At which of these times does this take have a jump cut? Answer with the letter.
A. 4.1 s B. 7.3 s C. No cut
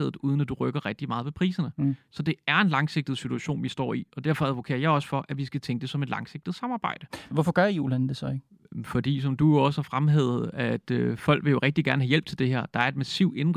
B